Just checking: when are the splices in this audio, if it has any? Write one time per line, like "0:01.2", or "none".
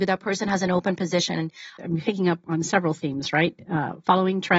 0:01.8